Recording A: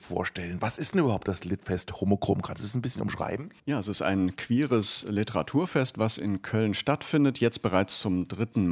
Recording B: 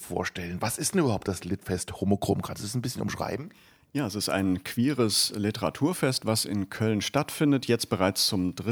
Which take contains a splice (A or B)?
A